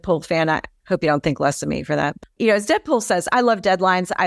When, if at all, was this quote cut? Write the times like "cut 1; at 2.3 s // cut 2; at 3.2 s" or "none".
none

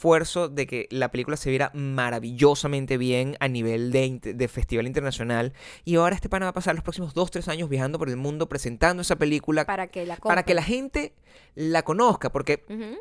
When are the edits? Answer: none

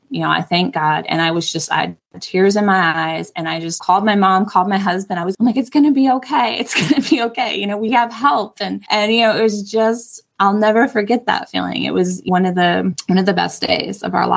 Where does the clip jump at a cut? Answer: cut 1; at 5.3 s

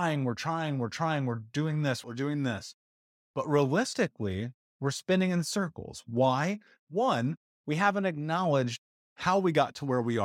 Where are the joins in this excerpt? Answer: cut 1; at 2.0 s // cut 2; at 6.8 s

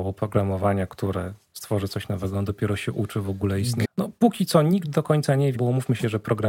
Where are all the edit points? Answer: cut 1; at 3.8 s // cut 2; at 5.5 s

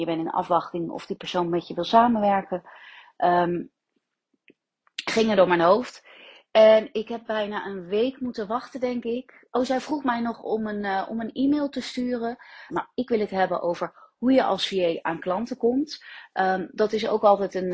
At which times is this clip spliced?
cut 1; at 12.7 s

